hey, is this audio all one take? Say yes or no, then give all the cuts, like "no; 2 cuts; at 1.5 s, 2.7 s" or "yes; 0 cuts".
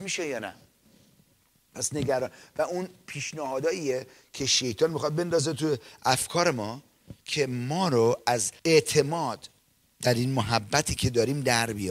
no; 2 cuts; at 7.2 s, 8.6 s